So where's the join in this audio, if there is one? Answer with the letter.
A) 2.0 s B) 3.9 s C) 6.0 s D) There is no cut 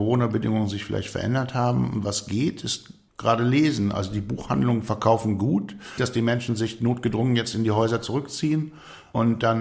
C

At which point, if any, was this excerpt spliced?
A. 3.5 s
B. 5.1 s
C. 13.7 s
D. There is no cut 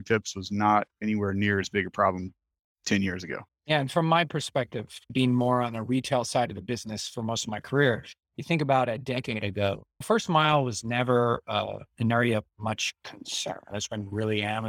C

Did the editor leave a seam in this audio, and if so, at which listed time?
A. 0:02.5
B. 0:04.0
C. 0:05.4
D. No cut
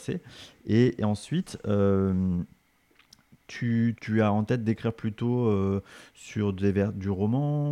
B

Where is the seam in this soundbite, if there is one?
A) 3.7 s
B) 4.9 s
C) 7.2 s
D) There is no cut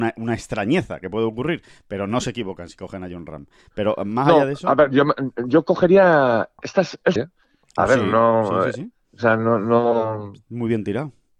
C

